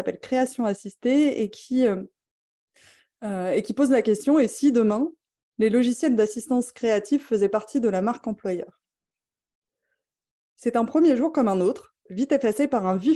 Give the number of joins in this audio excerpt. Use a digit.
1